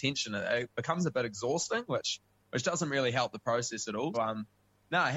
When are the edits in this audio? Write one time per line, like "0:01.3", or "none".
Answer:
0:04.1